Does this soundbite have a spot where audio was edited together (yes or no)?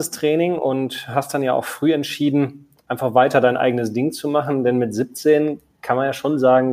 no